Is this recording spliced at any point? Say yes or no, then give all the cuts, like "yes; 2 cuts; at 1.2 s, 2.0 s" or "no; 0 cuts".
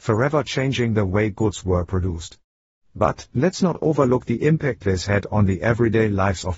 no; 0 cuts